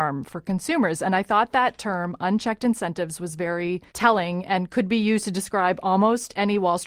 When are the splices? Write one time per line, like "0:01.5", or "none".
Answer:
0:03.9